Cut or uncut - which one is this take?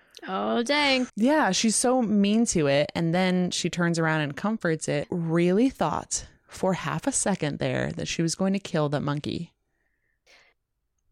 cut